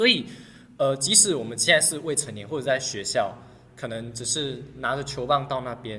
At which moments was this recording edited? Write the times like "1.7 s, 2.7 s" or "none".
none